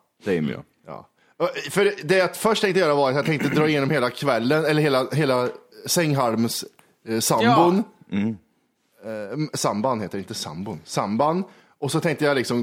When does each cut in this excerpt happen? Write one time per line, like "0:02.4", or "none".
none